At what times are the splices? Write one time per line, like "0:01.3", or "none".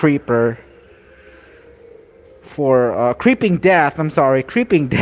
none